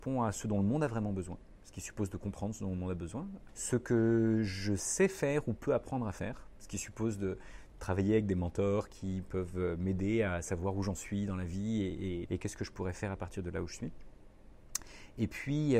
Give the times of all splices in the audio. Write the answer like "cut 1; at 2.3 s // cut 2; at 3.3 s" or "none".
cut 1; at 3.5 s // cut 2; at 12.3 s

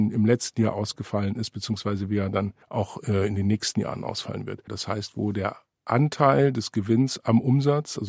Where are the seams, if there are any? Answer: cut 1; at 2.6 s // cut 2; at 4.7 s

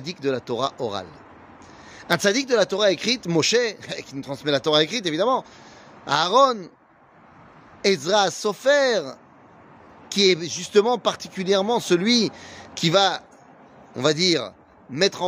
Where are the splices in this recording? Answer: none

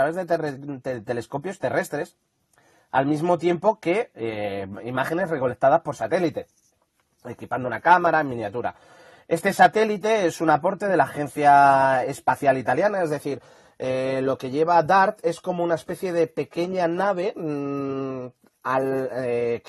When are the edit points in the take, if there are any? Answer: none

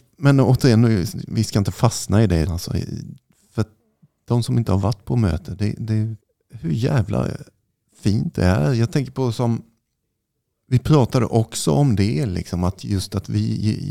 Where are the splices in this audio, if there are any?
cut 1; at 2.4 s

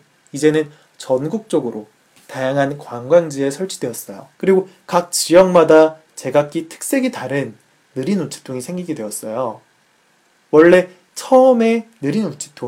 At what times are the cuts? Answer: cut 1; at 4.3 s

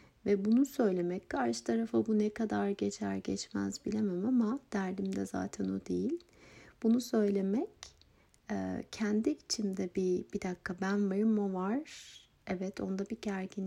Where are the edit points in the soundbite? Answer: none

